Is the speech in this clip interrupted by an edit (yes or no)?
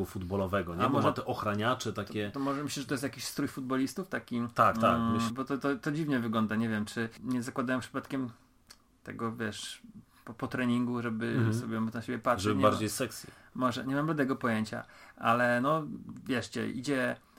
no